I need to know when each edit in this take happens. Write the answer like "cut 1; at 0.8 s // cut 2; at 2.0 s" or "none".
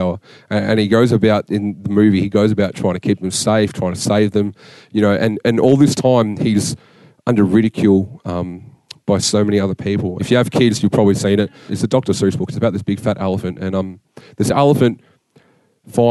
cut 1; at 10.2 s // cut 2; at 11.7 s